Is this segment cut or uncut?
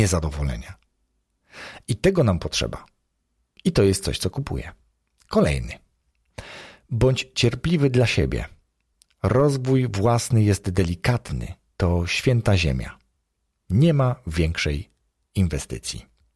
uncut